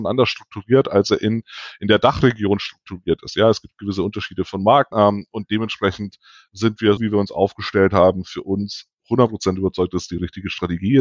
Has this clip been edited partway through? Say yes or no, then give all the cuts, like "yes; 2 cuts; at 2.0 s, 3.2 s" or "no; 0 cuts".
yes; 2 cuts; at 4.9 s, 7.0 s